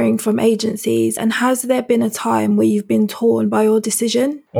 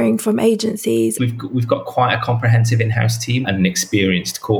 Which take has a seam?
second; 2 cuts; at 1.2 s, 3.4 s

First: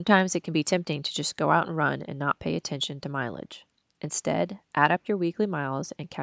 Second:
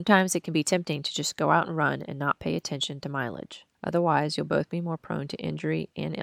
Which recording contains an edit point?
second; 1 cut; at 3.7 s

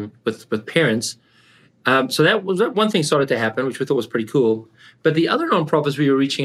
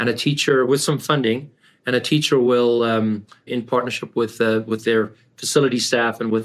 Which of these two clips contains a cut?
second; 1 cut; at 3.5 s

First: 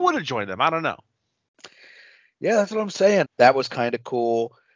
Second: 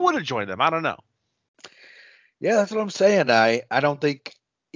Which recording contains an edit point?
first; 1 cut; at 3.2 s

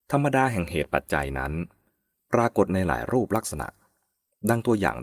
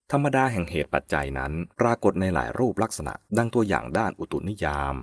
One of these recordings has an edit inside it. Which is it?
second; 2 cuts; at 1.7 s, 3.3 s

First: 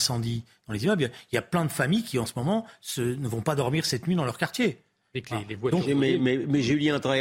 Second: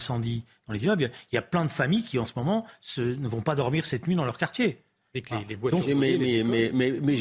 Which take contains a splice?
first; 1 cut; at 6.2 s

